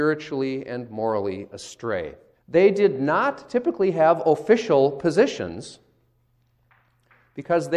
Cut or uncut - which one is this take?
cut